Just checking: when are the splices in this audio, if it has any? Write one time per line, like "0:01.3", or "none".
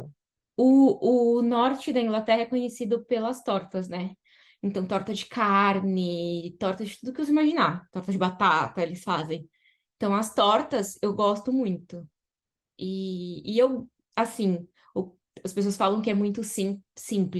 none